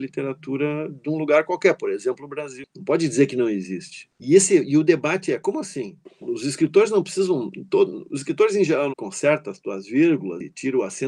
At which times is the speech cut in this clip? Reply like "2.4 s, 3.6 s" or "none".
4.1 s, 8.9 s